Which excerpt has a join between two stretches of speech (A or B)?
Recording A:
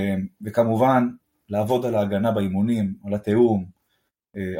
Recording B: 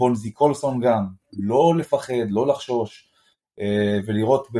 B